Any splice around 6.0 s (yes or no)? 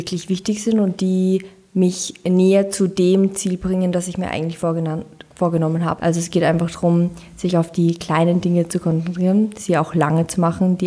yes